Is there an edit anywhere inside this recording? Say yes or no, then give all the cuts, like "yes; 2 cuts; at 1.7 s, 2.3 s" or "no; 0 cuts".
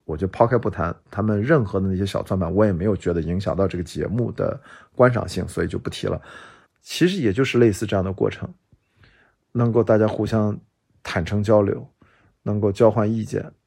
yes; 1 cut; at 6.7 s